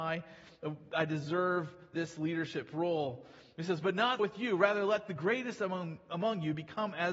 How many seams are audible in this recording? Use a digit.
1